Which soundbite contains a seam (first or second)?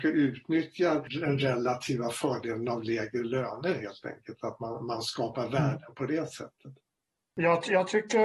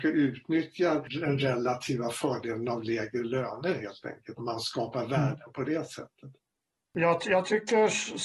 second